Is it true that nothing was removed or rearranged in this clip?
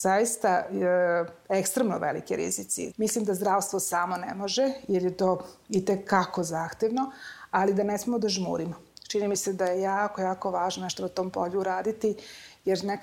no; 1 cut; at 2.9 s

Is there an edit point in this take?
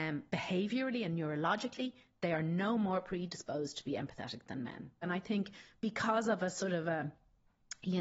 yes; 1 cut; at 5.0 s

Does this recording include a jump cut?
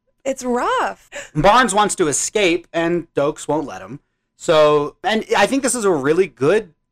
no; 0 cuts

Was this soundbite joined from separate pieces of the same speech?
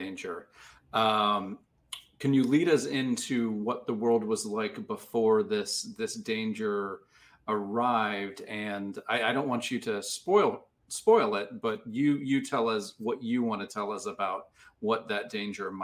no; 0 cuts

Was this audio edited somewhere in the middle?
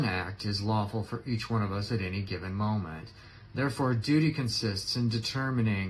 no; 0 cuts

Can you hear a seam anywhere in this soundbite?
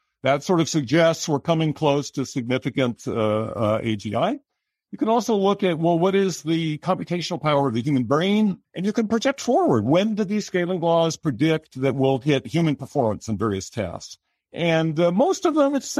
yes; 1 cut; at 8.6 s

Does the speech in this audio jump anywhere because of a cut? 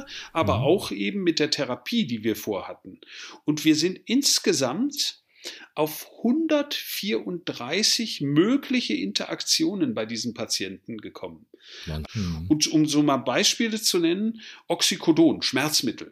yes; 1 cut; at 12.0 s

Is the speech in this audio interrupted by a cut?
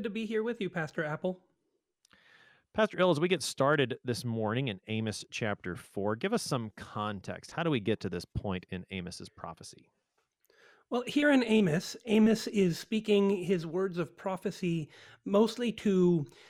no; 0 cuts

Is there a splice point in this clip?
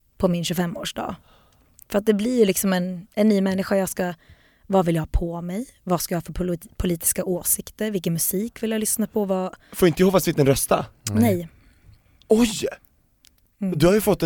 no; 0 cuts

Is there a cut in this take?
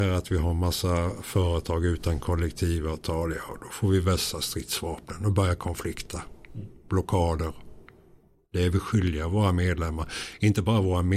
no; 0 cuts

